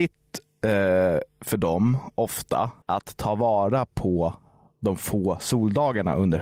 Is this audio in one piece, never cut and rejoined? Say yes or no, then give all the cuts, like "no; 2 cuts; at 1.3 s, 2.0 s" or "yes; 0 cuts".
yes; 0 cuts